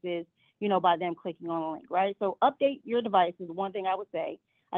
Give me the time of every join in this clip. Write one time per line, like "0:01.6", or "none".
none